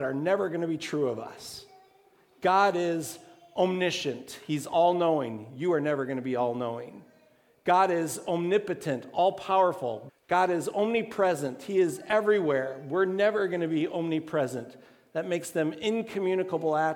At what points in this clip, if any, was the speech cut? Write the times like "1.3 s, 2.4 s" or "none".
10.1 s